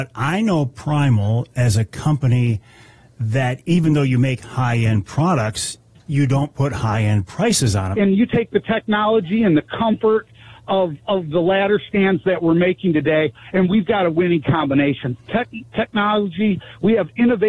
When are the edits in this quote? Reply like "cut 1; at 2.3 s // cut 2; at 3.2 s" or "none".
cut 1; at 7.9 s // cut 2; at 15.2 s